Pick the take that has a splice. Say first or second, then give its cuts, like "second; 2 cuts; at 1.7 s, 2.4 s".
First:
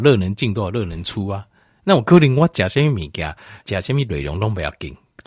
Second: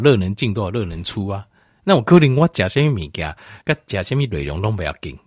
first; 1 cut; at 3.6 s